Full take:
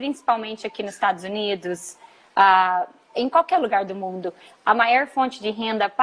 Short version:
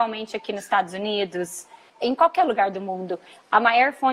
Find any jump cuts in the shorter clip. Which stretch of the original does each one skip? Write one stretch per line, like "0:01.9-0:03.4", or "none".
0:02.2-0:03.0

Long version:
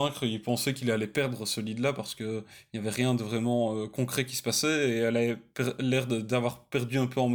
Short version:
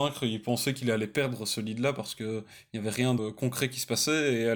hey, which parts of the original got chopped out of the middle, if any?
0:03.2-0:03.7

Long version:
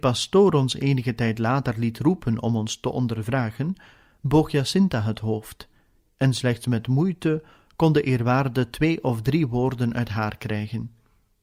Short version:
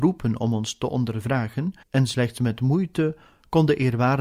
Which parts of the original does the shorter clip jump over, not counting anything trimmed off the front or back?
0:03.8-0:06.1

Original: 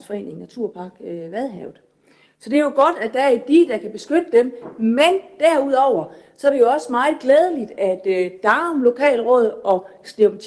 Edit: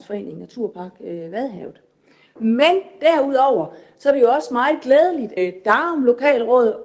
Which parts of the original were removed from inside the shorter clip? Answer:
0:02.4-0:04.7
0:07.8-0:08.1

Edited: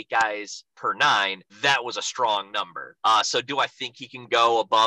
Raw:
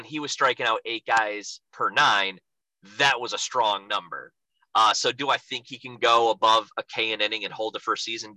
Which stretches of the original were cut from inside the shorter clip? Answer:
0:02.5-0:02.9
0:04.4-0:04.7

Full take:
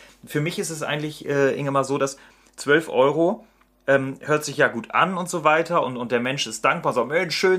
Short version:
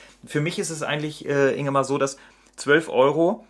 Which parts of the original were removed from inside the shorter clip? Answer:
none

